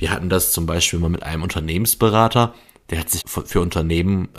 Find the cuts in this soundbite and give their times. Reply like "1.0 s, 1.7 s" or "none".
3.2 s